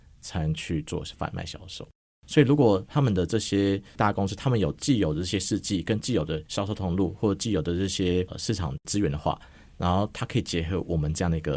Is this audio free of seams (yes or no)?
yes